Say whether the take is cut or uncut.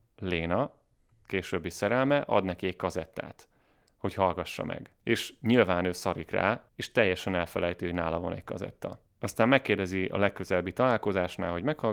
cut